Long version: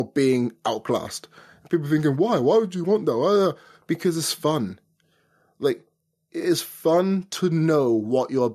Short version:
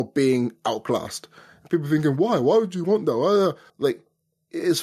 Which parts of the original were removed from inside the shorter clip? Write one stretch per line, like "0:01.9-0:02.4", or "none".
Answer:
0:03.7-0:05.5